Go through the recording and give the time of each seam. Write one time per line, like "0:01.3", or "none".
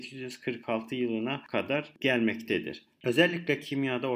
0:02.9